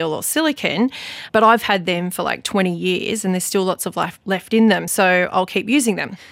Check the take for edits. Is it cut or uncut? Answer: uncut